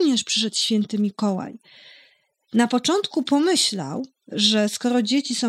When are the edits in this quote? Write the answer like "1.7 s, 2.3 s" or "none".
none